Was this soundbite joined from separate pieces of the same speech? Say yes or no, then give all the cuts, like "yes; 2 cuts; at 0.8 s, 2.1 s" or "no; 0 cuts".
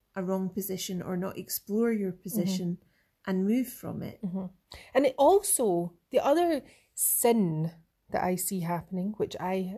no; 0 cuts